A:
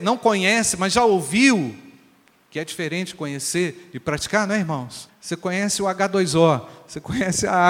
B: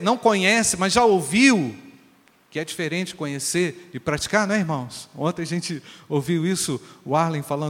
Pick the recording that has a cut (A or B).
A